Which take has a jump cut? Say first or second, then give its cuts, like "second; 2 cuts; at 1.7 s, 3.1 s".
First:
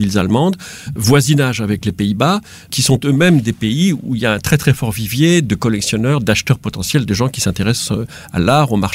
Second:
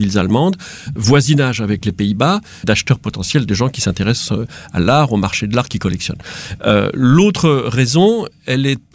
second; 1 cut; at 2.6 s